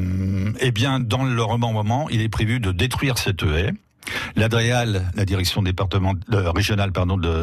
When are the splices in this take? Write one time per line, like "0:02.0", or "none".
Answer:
none